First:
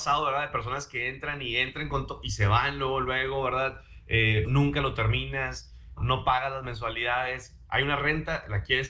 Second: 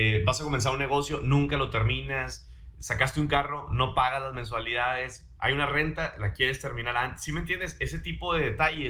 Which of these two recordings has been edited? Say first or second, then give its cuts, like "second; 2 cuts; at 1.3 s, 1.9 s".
first; 2 cuts; at 4.4 s, 6.0 s